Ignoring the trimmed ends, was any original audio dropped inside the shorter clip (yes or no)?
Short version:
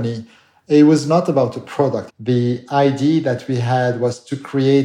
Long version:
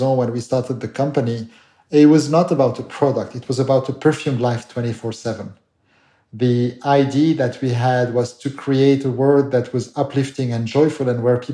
yes